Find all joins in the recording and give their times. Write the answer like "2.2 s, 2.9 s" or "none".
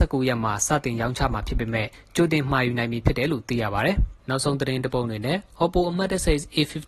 4.2 s